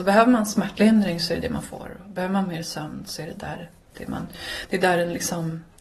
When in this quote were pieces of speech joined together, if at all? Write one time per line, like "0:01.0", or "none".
none